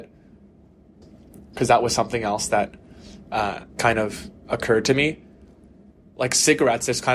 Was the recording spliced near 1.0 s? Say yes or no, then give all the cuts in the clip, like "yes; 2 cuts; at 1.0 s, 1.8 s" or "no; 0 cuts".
yes; 2 cuts; at 1.0 s, 3.7 s